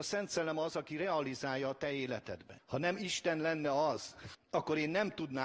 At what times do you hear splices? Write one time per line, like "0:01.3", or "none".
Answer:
0:02.6
0:04.3